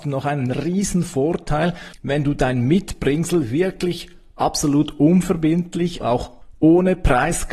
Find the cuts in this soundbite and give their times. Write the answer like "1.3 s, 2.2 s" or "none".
6.0 s